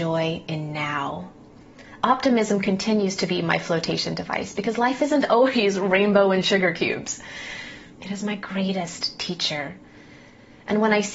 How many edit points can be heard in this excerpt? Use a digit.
1